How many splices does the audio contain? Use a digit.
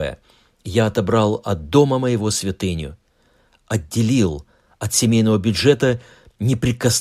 0